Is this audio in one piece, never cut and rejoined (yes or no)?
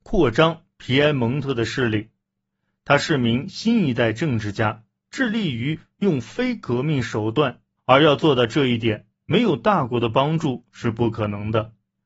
no